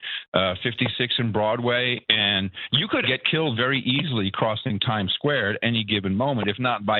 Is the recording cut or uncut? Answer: cut